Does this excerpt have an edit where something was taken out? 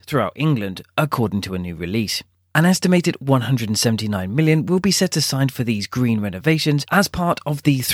no; 0 cuts

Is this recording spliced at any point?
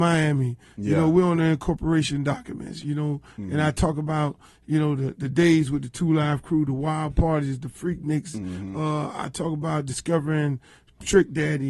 no; 0 cuts

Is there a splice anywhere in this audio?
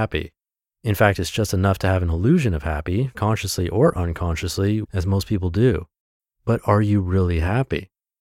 yes; 2 cuts; at 3.1 s, 4.8 s

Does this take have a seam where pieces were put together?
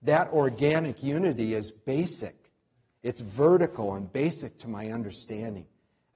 no; 0 cuts

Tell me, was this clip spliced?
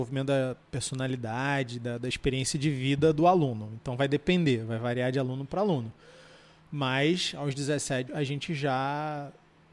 yes; 1 cut; at 8.1 s

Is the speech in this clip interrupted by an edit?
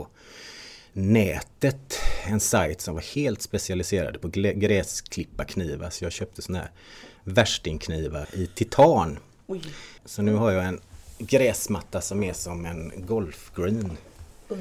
yes; 2 cuts; at 8.2 s, 10.0 s

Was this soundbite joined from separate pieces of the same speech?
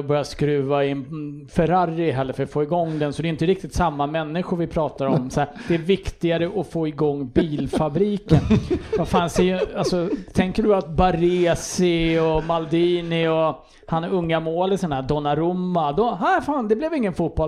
no; 0 cuts

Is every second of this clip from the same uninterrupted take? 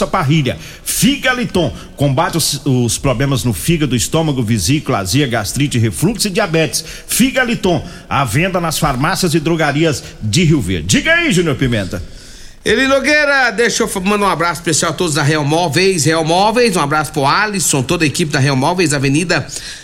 yes; 0 cuts

